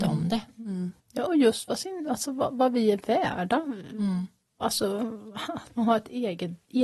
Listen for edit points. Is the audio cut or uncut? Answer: cut